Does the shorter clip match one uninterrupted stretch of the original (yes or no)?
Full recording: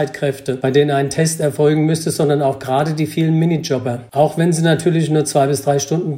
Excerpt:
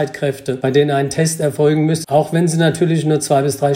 no